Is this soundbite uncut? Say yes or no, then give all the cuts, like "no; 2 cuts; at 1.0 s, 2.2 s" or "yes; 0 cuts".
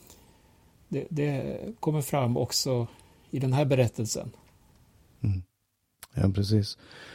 yes; 0 cuts